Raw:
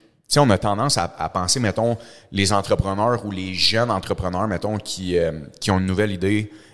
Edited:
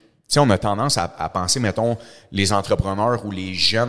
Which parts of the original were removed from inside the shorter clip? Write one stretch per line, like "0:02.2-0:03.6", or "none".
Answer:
none